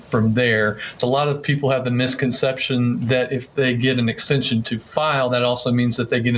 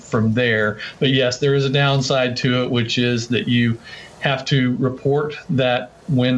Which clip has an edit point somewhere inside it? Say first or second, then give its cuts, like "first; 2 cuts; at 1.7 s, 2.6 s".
first; 1 cut; at 1.0 s